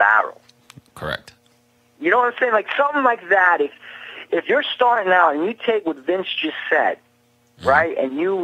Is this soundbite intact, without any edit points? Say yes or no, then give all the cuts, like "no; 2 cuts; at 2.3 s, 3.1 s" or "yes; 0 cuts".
yes; 0 cuts